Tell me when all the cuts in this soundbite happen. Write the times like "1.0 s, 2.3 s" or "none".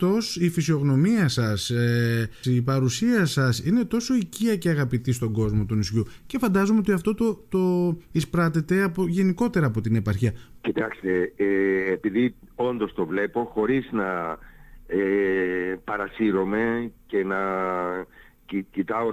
2.4 s, 10.6 s